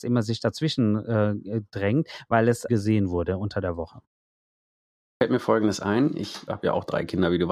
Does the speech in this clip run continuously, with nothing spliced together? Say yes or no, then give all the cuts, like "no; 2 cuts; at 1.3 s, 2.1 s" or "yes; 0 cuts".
no; 2 cuts; at 2.7 s, 6.5 s